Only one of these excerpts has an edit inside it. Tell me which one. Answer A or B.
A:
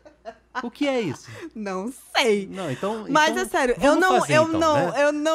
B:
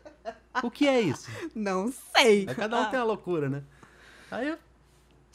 B